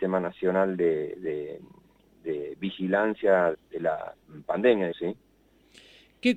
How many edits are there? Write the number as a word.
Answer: two